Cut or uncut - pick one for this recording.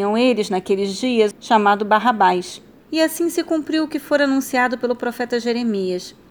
cut